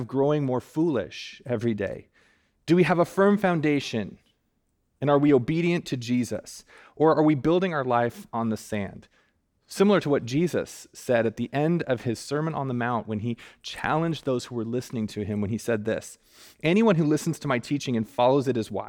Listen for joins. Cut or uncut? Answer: uncut